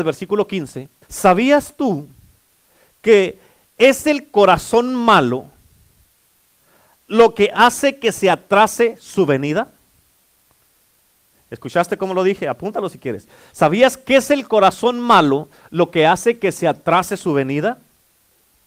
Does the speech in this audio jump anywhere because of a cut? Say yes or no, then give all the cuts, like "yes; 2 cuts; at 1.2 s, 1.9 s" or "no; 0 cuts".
yes; 1 cut; at 1.0 s